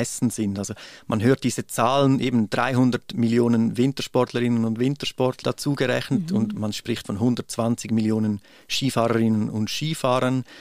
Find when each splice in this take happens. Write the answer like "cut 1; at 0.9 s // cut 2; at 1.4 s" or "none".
cut 1; at 5.4 s // cut 2; at 6.6 s